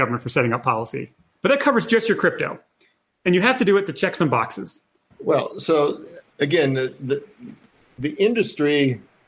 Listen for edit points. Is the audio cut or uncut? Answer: cut